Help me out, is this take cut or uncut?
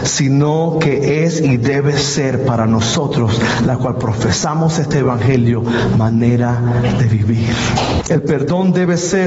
cut